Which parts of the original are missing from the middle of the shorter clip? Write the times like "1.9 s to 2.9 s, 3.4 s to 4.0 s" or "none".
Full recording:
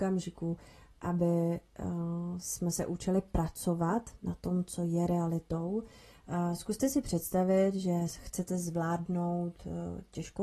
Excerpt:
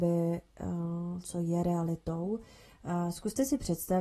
2.4 s to 4.6 s